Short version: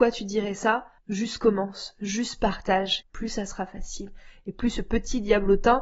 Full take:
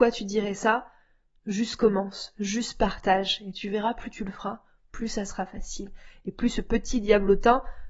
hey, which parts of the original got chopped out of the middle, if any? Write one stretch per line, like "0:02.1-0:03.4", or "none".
0:01.0-0:01.4
0:03.4-0:04.8